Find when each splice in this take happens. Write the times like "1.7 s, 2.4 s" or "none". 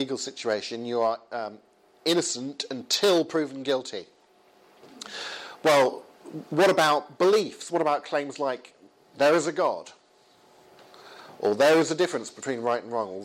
none